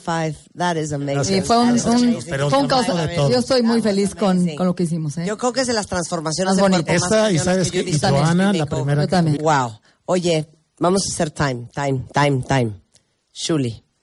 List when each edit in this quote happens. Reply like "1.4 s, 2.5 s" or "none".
9.4 s

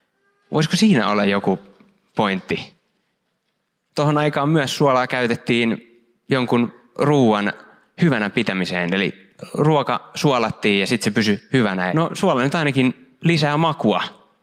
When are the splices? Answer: 3.9 s, 11.9 s

